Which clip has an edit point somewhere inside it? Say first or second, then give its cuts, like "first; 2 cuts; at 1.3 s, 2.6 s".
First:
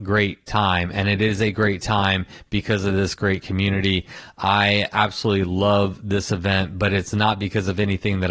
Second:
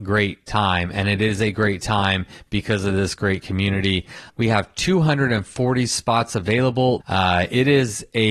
second; 2 cuts; at 4.3 s, 7.0 s